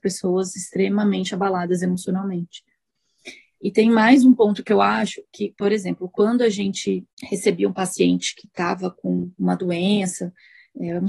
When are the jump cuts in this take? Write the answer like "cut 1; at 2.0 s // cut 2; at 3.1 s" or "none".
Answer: cut 1; at 7.1 s // cut 2; at 9.3 s